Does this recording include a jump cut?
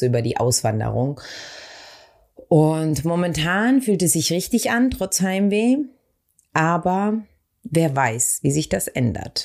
no; 0 cuts

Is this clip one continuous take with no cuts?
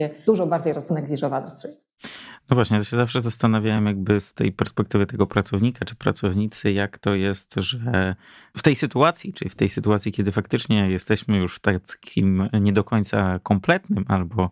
yes; 0 cuts

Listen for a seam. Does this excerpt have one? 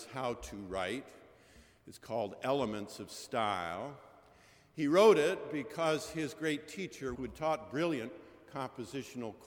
yes; 1 cut; at 7.1 s

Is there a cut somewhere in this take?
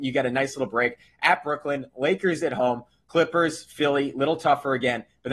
yes; 1 cut; at 3.0 s

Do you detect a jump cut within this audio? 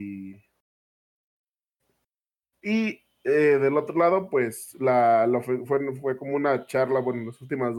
yes; 1 cut; at 2.4 s

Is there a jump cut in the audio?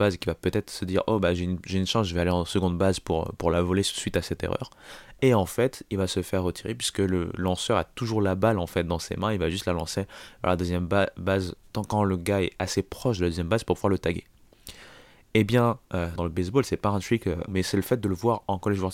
yes; 2 cuts; at 16.2 s, 17.5 s

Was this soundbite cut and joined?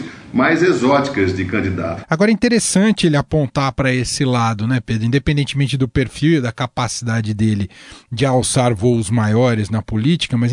yes; 1 cut; at 2.0 s

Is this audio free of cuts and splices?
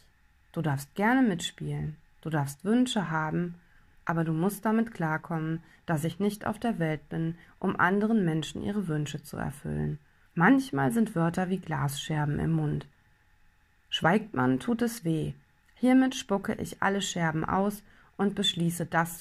no; 2 cuts; at 10.3 s, 15.6 s

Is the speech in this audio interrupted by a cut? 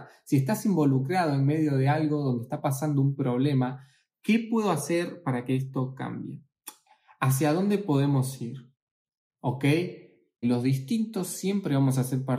yes; 1 cut; at 10.4 s

